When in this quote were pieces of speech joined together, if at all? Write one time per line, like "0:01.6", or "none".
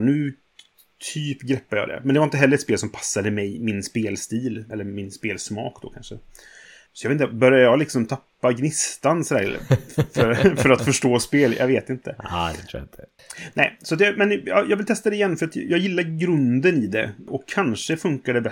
none